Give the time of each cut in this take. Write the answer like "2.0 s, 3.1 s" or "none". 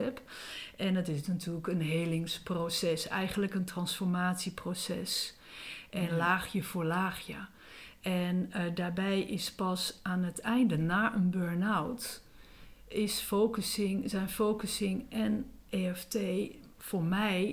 none